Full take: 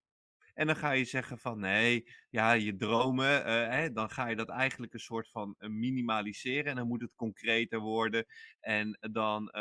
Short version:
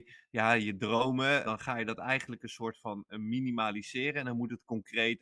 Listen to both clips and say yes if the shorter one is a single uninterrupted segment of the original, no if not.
no